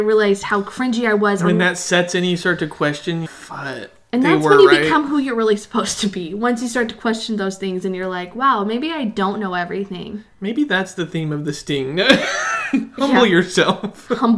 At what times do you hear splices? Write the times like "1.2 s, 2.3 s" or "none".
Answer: 3.2 s

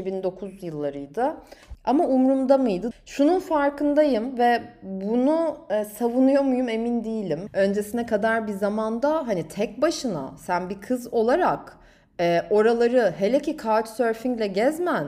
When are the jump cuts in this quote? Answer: 1.8 s, 2.9 s, 7.5 s

